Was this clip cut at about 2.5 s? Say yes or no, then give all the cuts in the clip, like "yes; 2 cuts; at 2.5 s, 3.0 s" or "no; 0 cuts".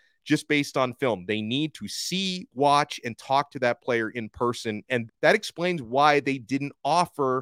no; 1 cut; at 5.1 s